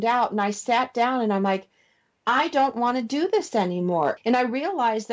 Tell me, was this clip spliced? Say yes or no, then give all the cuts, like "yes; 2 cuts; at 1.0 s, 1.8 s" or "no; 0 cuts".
yes; 1 cut; at 4.2 s